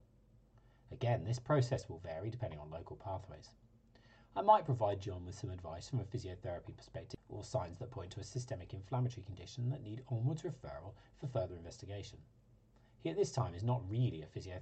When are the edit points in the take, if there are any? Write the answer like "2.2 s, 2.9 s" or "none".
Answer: 7.2 s